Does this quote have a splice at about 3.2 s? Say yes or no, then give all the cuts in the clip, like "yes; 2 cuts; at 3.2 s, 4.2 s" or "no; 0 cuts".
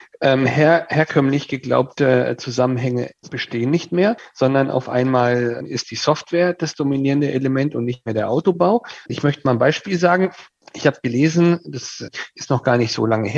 yes; 2 cuts; at 3.2 s, 9.1 s